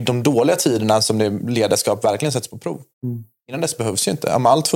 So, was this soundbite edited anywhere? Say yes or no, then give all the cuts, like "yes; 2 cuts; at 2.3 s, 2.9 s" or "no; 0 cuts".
yes; 1 cut; at 2.9 s